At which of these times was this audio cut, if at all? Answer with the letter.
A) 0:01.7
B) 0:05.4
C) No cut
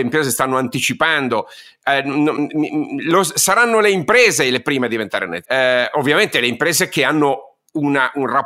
B